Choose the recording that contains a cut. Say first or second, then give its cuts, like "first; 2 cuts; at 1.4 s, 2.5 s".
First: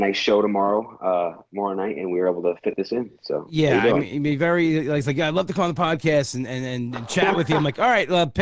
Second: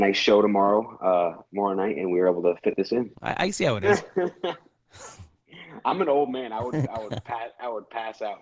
second; 1 cut; at 3.1 s